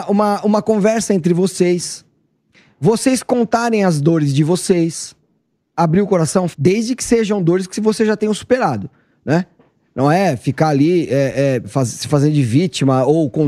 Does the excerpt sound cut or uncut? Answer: cut